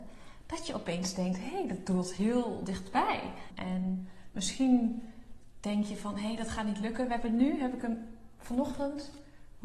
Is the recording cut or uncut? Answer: cut